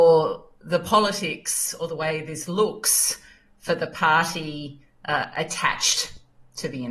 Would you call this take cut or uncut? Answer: uncut